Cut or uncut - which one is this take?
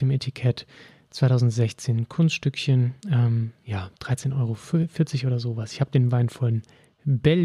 cut